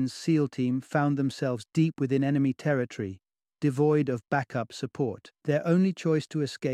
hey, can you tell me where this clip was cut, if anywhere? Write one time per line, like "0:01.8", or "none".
0:05.4